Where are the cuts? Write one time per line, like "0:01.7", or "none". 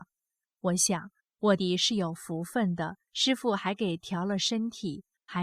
0:01.6
0:03.1

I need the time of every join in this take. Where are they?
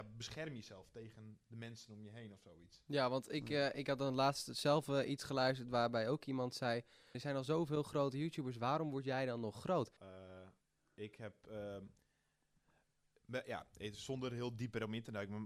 0:07.1
0:10.0

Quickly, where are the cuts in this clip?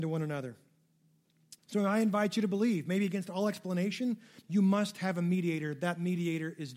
0:01.6
0:04.4

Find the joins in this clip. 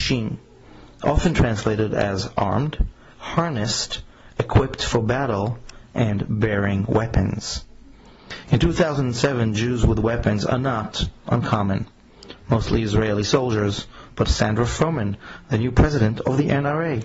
0:14.2

